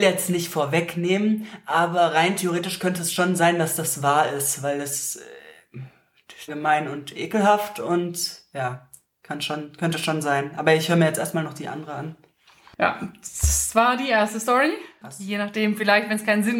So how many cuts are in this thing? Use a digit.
2